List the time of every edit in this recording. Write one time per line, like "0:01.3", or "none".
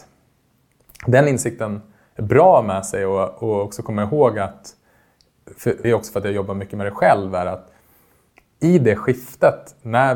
0:05.8